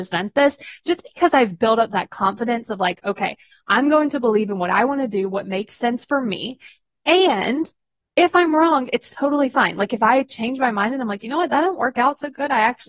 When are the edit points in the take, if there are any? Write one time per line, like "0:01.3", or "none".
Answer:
none